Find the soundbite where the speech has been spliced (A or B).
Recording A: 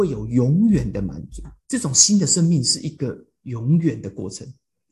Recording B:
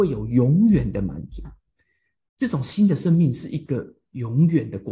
A